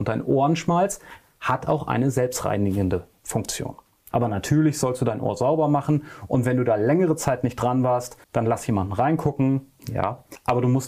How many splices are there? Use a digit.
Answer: 3